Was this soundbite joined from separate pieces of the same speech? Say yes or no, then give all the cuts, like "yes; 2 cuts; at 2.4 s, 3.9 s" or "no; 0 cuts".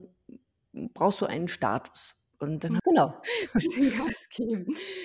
yes; 1 cut; at 2.8 s